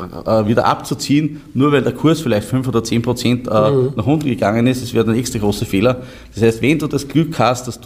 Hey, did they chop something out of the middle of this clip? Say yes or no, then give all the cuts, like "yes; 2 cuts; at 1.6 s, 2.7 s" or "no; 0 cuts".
no; 0 cuts